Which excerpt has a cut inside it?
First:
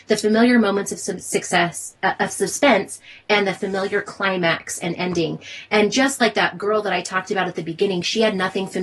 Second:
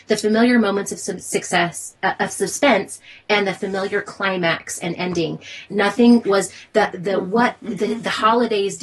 second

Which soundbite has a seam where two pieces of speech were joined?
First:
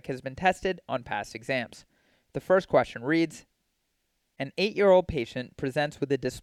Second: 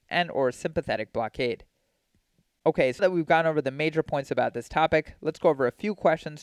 second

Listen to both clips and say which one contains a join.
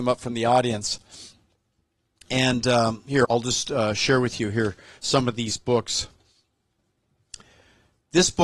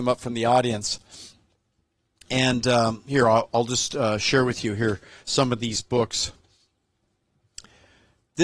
first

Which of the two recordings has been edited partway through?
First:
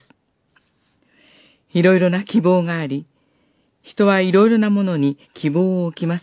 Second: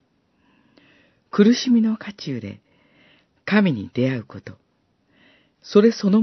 first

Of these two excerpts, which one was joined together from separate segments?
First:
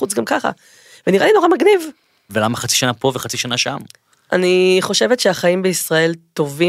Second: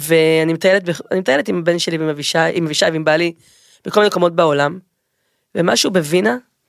first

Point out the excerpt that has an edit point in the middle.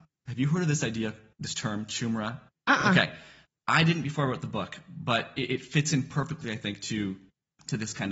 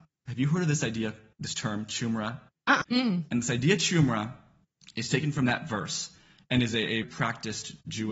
second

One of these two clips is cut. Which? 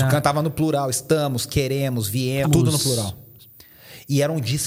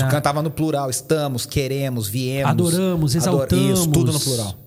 first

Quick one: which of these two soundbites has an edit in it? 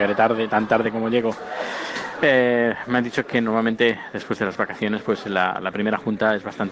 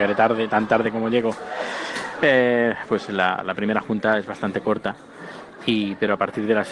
second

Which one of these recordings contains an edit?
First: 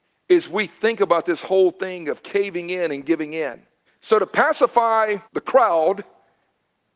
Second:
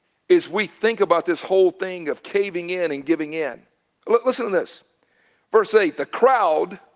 first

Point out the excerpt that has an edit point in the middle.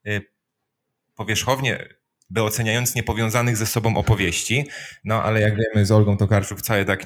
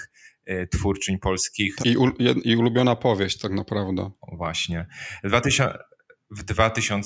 second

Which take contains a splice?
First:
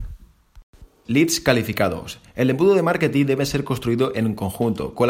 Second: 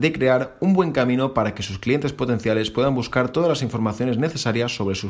first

